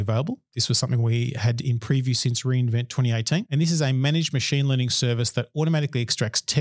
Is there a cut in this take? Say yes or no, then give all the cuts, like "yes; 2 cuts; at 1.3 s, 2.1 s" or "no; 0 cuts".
no; 0 cuts